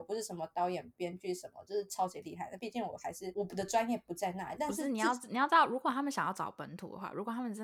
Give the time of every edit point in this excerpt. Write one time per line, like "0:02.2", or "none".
none